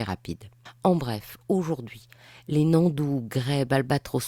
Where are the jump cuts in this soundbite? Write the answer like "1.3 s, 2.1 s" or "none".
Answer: none